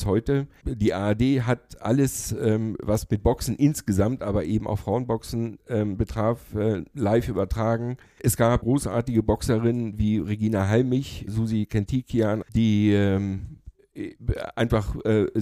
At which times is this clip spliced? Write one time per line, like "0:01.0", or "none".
0:11.3
0:12.4